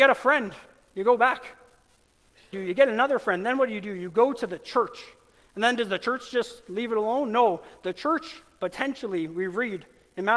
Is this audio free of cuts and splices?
no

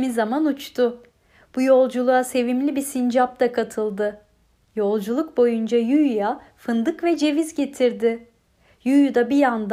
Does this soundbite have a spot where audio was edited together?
no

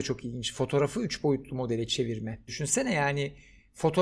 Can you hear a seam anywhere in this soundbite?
yes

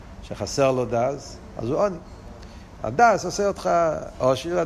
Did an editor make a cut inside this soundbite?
yes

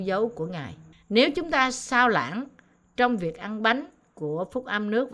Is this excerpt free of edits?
no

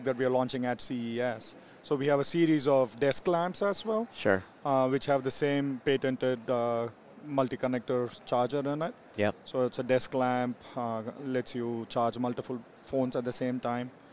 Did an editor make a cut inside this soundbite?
no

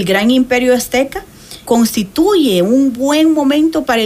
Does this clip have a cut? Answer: yes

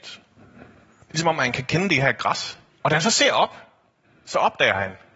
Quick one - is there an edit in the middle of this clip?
yes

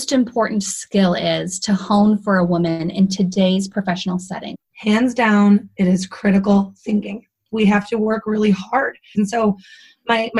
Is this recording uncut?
no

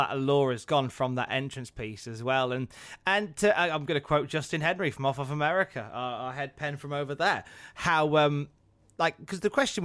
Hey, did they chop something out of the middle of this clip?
no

